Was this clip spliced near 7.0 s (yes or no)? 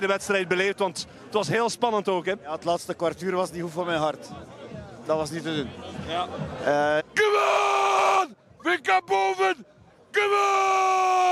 yes